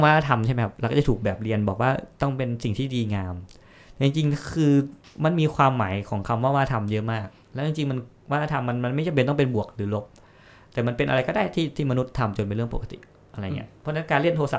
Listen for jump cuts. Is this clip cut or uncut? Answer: uncut